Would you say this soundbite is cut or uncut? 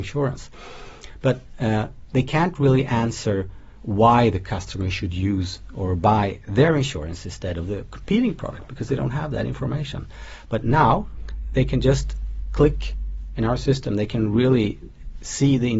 uncut